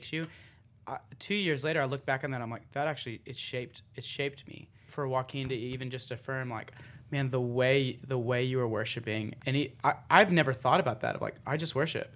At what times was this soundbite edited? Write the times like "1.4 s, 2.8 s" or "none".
4.9 s